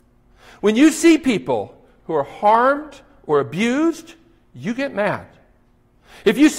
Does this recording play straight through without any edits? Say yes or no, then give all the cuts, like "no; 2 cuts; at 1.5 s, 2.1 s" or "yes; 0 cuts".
yes; 0 cuts